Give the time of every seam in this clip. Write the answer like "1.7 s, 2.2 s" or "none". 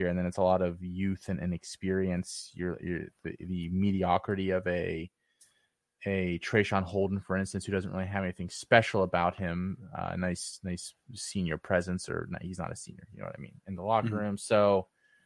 none